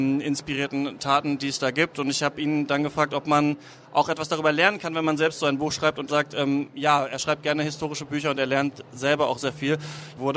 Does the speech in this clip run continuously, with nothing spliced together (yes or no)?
no